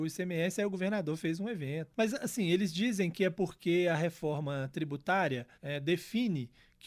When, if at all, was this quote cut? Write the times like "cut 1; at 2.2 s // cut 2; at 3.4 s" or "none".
cut 1; at 1.9 s // cut 2; at 5.5 s